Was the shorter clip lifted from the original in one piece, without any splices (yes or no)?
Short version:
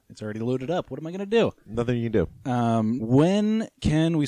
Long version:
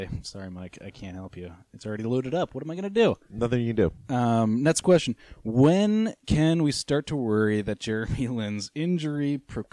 no